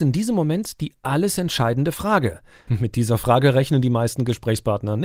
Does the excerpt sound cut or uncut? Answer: cut